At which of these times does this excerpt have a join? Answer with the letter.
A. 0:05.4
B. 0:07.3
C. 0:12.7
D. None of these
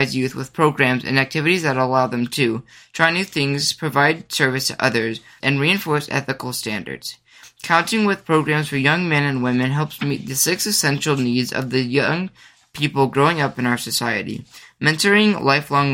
A